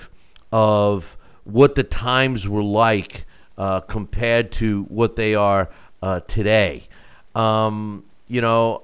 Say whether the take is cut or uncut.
uncut